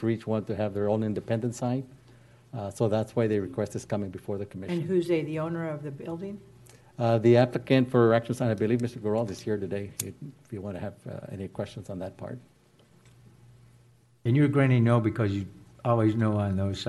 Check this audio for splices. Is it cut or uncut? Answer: uncut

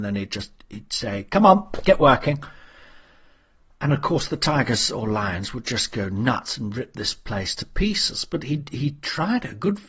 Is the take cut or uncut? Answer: uncut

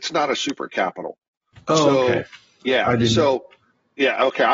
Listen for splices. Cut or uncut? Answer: uncut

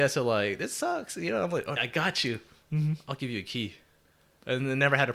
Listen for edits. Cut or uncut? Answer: cut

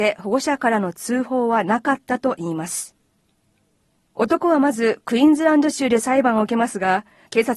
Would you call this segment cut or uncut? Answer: uncut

